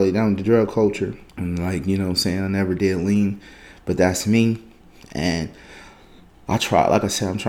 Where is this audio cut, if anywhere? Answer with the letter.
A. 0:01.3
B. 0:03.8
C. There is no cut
A